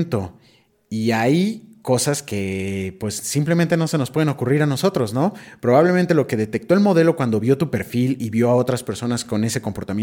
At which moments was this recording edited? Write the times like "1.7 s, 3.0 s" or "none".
none